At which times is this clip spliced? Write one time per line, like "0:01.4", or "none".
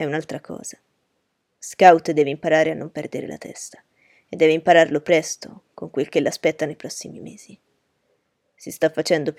none